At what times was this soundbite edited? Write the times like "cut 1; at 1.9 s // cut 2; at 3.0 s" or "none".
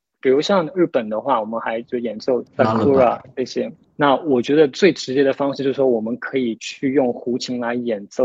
cut 1; at 3.8 s